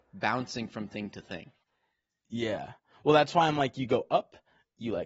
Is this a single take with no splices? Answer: yes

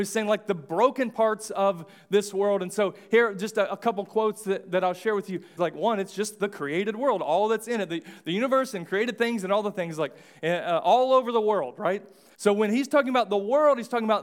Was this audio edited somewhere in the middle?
yes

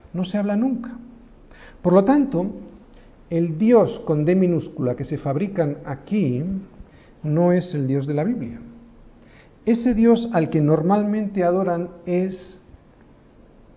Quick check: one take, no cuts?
yes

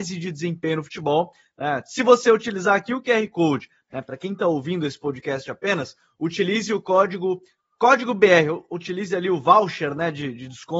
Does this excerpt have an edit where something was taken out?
yes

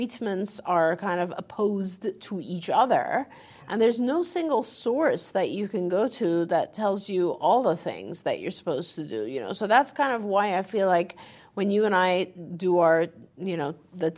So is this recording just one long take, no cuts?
yes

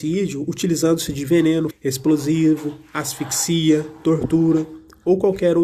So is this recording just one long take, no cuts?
no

